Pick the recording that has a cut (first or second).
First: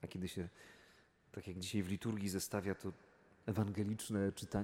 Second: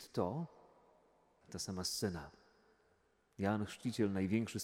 second